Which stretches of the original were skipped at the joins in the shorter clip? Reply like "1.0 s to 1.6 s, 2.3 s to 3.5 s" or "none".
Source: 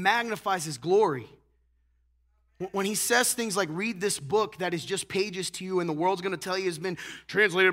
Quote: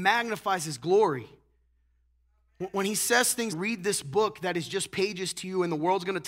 3.5 s to 3.7 s